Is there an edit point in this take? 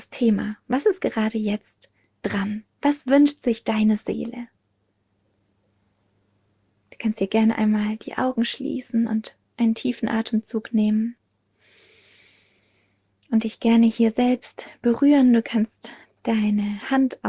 no; 0 cuts

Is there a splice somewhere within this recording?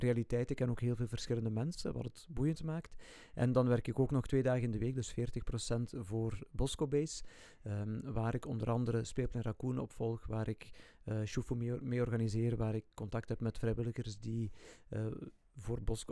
no; 0 cuts

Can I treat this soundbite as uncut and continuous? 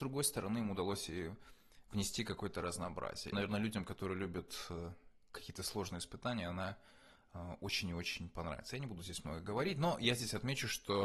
no; 1 cut; at 3.3 s

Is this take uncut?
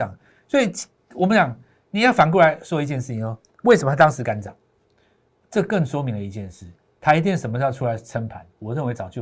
yes; 0 cuts

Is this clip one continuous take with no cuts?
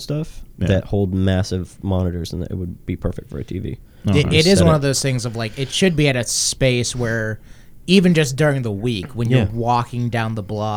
yes; 0 cuts

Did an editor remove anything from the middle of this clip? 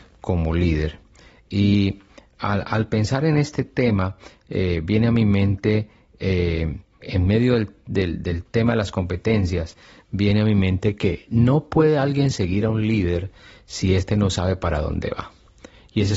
yes; 1 cut; at 7.0 s

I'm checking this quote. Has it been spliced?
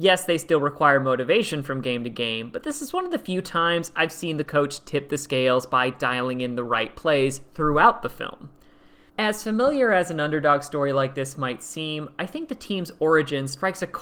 yes; 1 cut; at 9.1 s

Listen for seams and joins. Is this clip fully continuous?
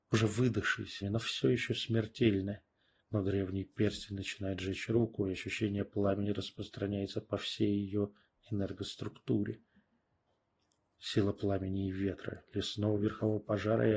no; 2 cuts; at 1.0 s, 3.0 s

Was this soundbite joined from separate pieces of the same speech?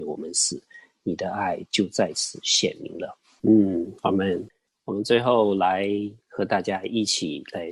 yes; 1 cut; at 3.4 s

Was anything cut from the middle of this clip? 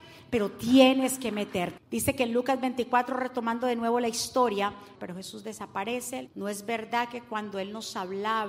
yes; 3 cuts; at 1.8 s, 4.9 s, 6.3 s

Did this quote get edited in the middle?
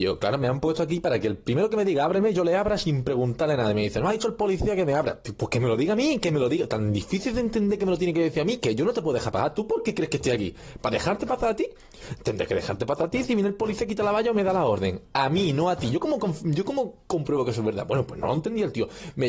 no; 0 cuts

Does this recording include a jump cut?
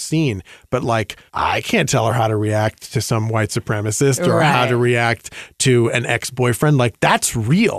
yes; 1 cut; at 1.3 s

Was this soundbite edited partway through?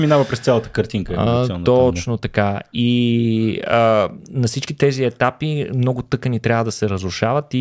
no; 0 cuts

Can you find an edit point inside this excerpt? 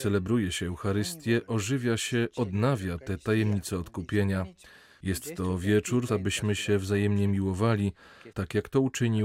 yes; 2 cuts; at 6.1 s, 8.3 s

